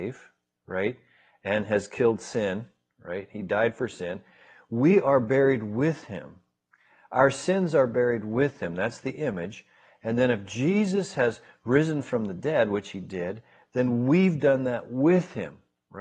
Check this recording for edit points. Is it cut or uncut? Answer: uncut